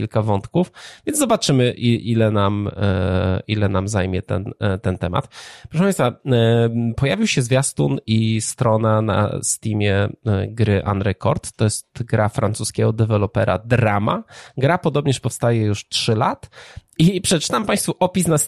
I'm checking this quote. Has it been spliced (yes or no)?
no